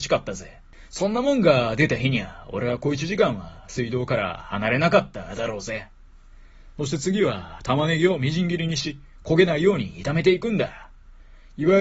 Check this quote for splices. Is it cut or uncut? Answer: uncut